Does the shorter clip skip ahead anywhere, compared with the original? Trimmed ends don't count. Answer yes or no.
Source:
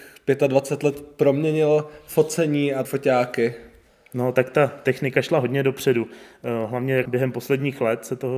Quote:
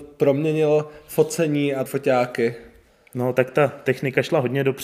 no